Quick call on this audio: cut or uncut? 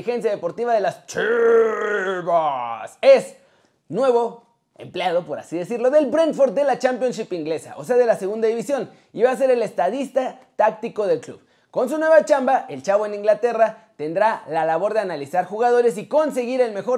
uncut